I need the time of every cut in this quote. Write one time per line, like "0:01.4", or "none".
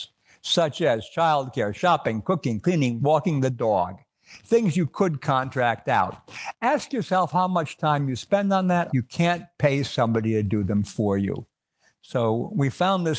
0:08.9